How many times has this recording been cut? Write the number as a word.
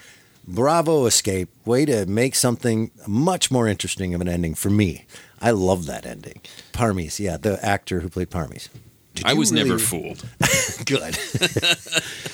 two